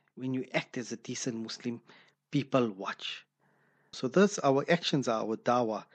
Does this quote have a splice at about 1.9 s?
no; 1 cut; at 3.9 s

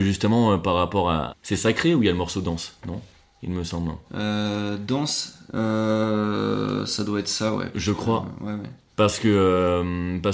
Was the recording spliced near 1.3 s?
yes; 1 cut; at 1.3 s

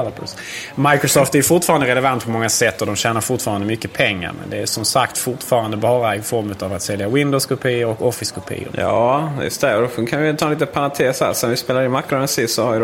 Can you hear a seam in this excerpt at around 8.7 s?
yes; 1 cut; at 8.7 s

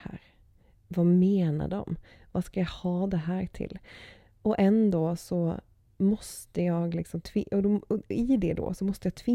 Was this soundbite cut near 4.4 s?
no; 0 cuts

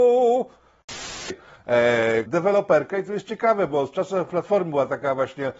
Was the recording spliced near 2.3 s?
yes; 1 cut; at 2.3 s

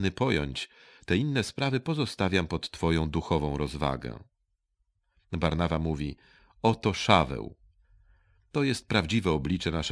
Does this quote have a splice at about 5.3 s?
no; 0 cuts

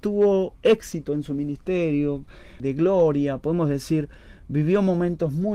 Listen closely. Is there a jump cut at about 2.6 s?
yes; 1 cut; at 2.6 s

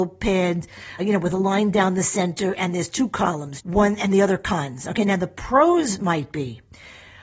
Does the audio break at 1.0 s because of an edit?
yes; 2 cuts; at 1.0 s, 3.6 s

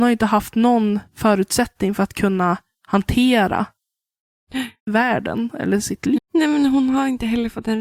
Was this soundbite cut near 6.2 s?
yes; 1 cut; at 6.2 s

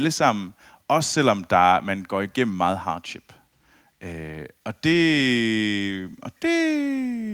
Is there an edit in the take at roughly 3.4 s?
no; 1 cut; at 6.4 s

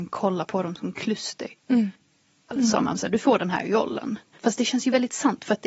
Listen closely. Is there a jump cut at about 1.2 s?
no; 2 cuts; at 2.5 s, 4.4 s

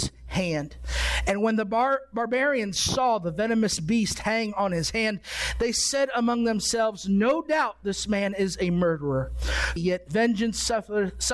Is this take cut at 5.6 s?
no; 1 cut; at 9.8 s

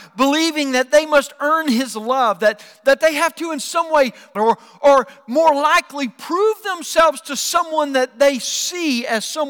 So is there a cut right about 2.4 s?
no; 1 cut; at 4.4 s

